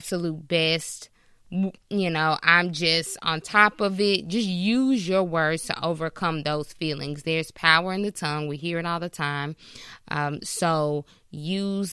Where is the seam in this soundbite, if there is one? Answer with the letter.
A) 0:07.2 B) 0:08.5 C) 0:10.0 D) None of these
D